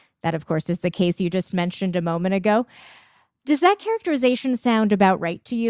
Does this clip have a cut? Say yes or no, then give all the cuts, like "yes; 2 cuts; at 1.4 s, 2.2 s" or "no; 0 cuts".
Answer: no; 0 cuts